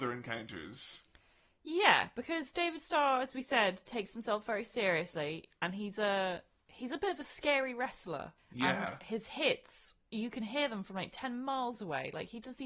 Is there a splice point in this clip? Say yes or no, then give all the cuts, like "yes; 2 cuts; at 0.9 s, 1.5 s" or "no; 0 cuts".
yes; 1 cut; at 8.4 s